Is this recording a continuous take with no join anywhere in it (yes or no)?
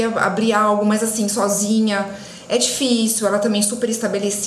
yes